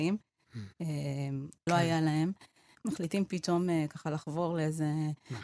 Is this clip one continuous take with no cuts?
no; 1 cut; at 1.7 s

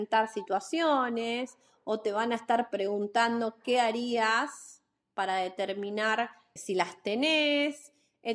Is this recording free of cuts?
no; 1 cut; at 6.6 s

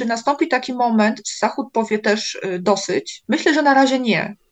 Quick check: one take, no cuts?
yes; 0 cuts

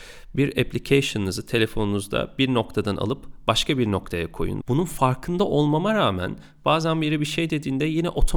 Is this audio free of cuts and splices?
no; 1 cut; at 4.6 s

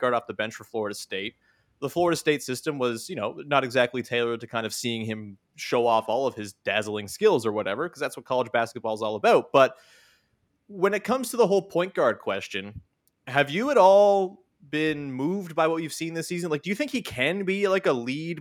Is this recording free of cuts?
yes; 0 cuts

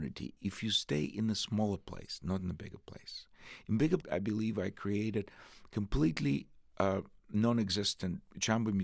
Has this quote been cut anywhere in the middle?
yes; 1 cut; at 4.0 s

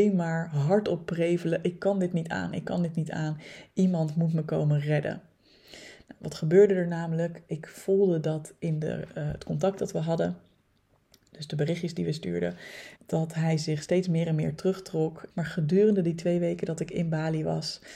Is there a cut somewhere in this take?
yes; 2 cuts; at 12.9 s, 15.3 s

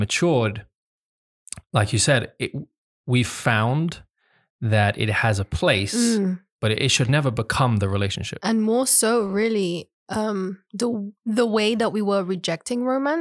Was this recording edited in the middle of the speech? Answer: no; 0 cuts

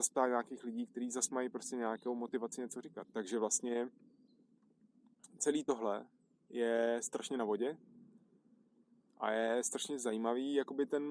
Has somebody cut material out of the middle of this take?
yes; 1 cut; at 3.0 s

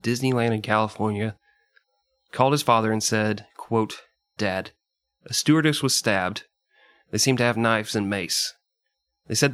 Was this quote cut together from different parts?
yes; 1 cut; at 4.4 s

